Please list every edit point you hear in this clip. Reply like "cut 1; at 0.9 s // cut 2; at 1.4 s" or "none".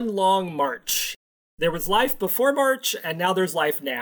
none